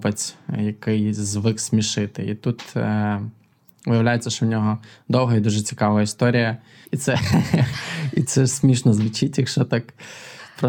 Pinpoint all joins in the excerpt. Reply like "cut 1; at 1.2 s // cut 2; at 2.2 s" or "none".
cut 1; at 6.8 s